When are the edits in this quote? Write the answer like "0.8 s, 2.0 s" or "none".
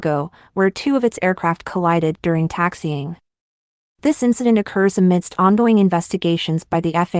none

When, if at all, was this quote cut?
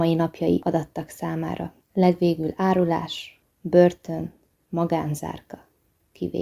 3.4 s

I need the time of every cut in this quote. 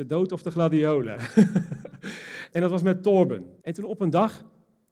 2.5 s, 3.6 s

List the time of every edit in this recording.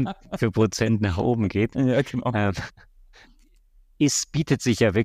3.2 s

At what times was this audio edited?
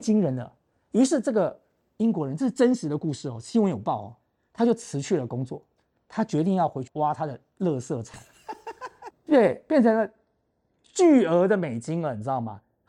6.9 s, 9.1 s

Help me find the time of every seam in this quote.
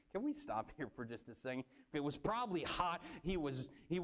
1.9 s

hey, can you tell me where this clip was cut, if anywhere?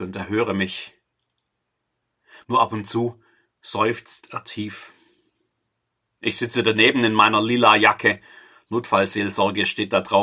2.4 s

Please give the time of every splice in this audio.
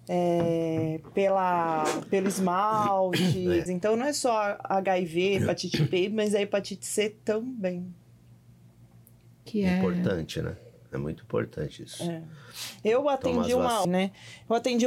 3.7 s, 13.8 s

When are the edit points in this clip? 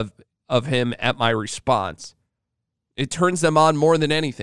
2.9 s

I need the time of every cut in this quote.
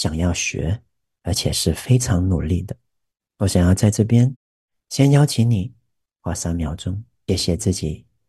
7.3 s

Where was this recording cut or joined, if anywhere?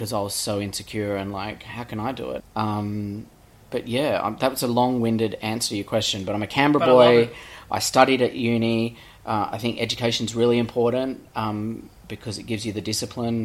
2.4 s

